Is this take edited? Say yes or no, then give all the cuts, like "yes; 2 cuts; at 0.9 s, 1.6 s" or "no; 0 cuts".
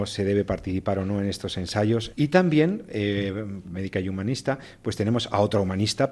yes; 2 cuts; at 2.1 s, 3.6 s